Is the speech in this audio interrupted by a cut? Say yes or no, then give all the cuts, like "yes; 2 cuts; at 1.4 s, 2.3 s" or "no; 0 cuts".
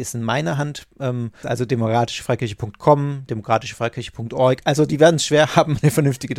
yes; 2 cuts; at 1.4 s, 3.3 s